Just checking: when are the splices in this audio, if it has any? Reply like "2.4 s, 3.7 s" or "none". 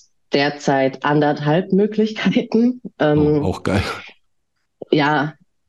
none